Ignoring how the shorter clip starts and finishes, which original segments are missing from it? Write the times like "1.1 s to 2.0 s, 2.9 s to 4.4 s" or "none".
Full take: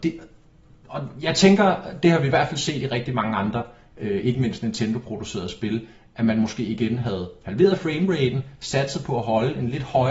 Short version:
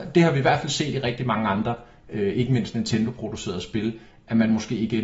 none